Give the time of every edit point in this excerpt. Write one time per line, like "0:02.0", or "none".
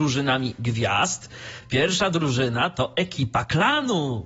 none